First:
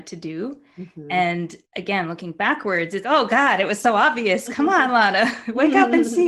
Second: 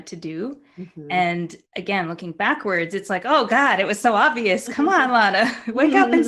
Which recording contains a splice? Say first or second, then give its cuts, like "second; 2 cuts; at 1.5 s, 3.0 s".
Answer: first; 1 cut; at 3.0 s